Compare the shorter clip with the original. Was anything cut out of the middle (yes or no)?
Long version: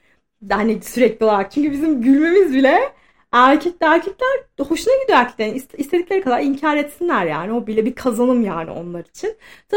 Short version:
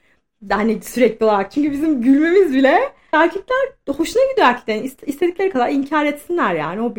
yes